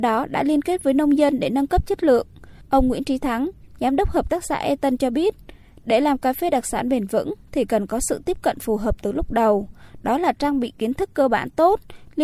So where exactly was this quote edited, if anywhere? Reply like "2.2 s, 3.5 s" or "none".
2.6 s